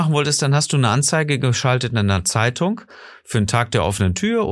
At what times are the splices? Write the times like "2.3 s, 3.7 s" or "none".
none